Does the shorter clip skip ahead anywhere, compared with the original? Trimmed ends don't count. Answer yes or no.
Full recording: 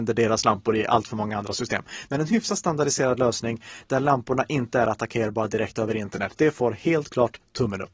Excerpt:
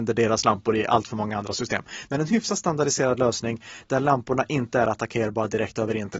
no